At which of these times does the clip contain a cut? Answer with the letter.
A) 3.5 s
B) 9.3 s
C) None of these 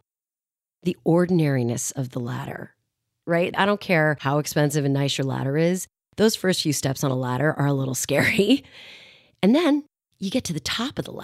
A